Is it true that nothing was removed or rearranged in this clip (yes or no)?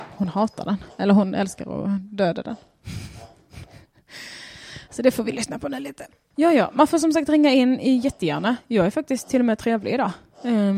no